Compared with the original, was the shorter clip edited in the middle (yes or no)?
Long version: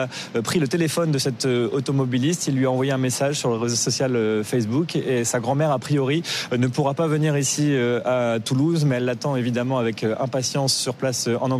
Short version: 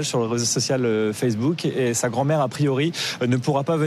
no